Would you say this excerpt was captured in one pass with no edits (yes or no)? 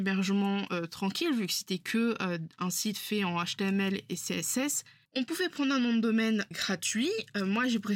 no